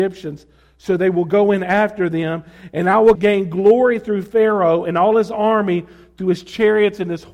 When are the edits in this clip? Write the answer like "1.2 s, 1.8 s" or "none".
3.2 s